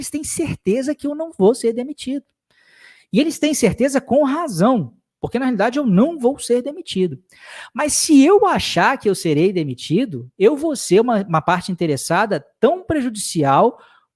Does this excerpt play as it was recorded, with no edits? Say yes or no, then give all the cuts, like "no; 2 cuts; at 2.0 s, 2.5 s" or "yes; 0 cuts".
yes; 0 cuts